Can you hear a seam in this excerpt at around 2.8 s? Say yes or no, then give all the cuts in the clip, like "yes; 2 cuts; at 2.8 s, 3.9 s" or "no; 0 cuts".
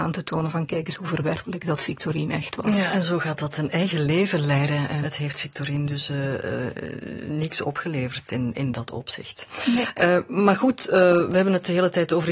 no; 1 cut; at 5.0 s